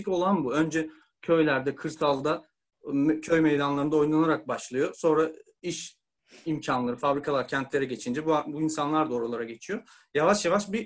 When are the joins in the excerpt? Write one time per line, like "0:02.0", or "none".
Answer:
none